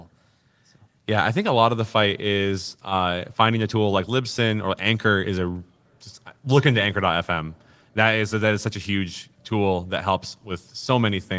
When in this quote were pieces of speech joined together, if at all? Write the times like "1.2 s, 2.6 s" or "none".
none

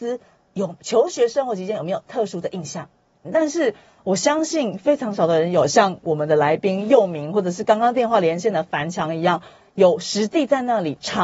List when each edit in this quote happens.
3.2 s

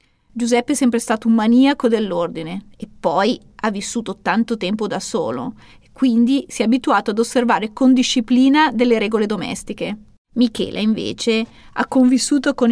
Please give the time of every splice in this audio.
none

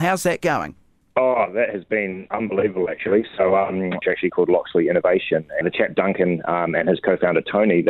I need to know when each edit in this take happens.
4.0 s, 5.6 s

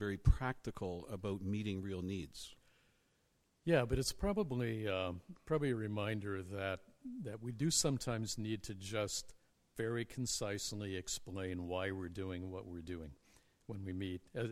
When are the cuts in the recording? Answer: none

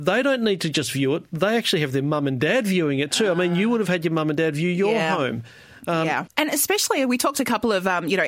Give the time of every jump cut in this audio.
6.3 s

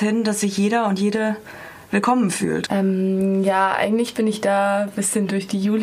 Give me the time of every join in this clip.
2.7 s

